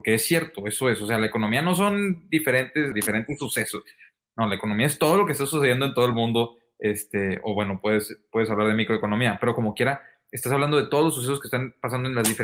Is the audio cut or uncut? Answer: cut